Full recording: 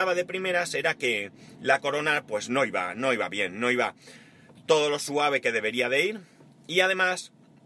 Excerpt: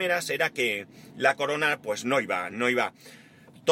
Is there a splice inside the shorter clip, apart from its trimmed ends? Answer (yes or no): yes